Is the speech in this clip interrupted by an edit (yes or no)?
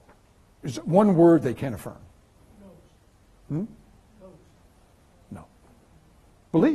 no